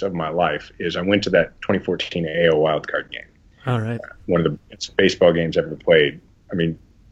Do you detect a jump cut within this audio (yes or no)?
no